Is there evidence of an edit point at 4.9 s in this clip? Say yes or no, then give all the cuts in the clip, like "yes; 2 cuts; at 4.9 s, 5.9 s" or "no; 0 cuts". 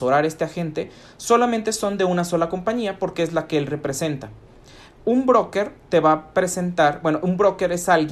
no; 0 cuts